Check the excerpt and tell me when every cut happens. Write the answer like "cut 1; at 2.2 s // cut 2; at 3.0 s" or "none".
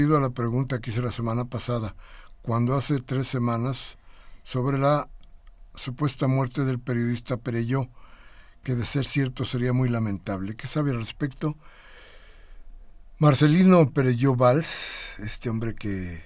none